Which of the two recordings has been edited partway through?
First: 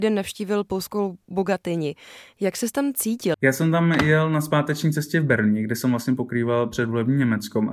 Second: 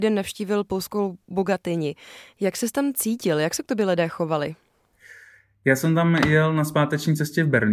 first; 1 cut; at 3.3 s

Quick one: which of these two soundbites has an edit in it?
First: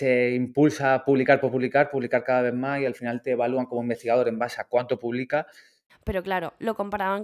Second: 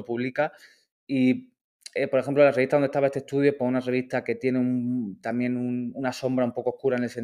first; 1 cut; at 5.9 s

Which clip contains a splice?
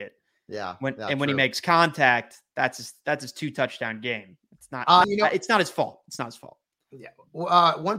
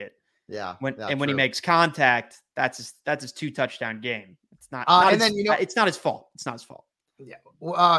first; 1 cut; at 5.0 s

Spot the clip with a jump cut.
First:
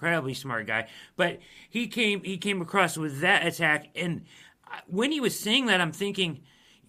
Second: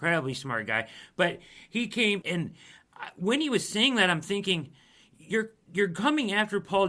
second; 1 cut; at 2.2 s

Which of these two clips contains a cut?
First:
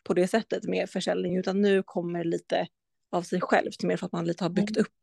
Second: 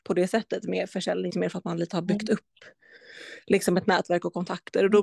second; 1 cut; at 1.3 s

